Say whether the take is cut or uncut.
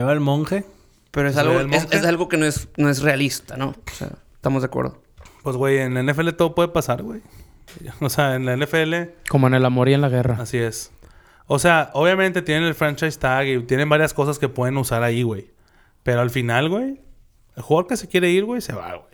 uncut